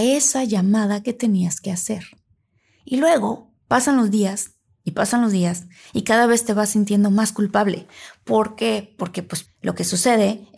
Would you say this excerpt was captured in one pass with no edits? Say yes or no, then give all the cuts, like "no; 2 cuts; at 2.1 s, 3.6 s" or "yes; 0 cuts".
no; 1 cut; at 9.5 s